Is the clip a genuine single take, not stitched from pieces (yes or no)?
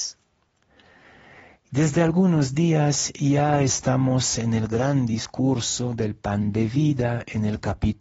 yes